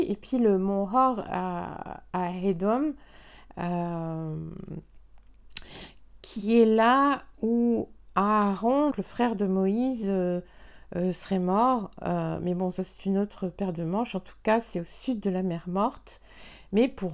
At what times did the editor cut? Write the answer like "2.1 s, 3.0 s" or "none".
8.9 s